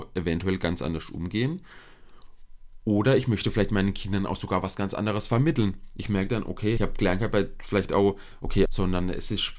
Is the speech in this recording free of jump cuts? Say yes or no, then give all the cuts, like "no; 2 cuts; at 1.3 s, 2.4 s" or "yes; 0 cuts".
no; 2 cuts; at 6.8 s, 8.6 s